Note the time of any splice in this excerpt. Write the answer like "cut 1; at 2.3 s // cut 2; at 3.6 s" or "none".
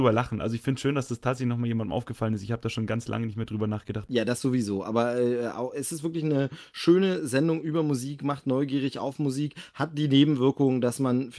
cut 1; at 4.1 s